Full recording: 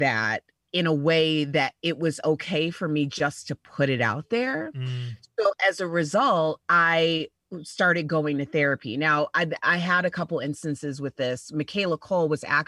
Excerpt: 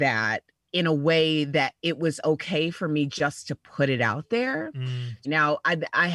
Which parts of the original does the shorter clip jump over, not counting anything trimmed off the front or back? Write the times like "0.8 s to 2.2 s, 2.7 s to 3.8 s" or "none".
5.2 s to 8.9 s